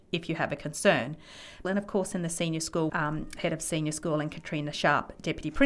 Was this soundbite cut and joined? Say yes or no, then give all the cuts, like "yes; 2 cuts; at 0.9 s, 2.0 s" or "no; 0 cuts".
yes; 2 cuts; at 1.6 s, 2.9 s